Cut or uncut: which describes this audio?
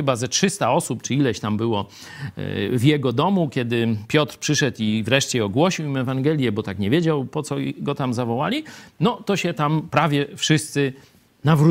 uncut